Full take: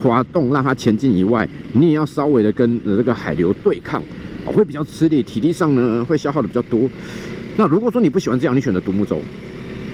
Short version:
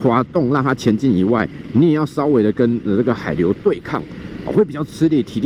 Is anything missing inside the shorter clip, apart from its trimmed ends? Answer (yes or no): no